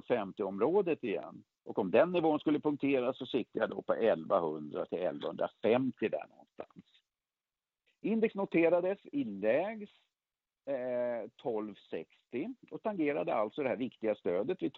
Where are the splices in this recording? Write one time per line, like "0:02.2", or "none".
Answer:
0:07.9